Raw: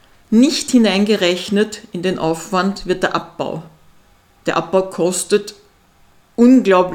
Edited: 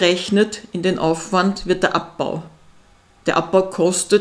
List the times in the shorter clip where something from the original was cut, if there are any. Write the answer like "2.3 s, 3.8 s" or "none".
none